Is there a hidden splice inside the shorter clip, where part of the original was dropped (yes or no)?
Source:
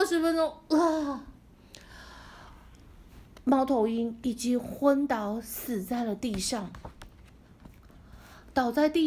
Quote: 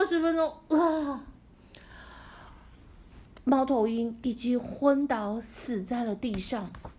no